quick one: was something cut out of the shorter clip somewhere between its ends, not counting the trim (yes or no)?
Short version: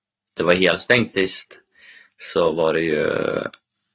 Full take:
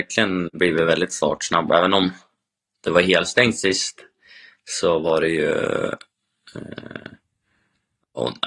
no